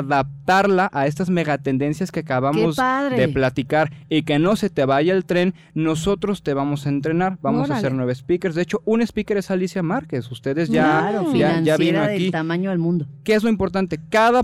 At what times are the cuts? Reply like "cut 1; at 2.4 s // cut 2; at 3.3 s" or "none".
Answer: none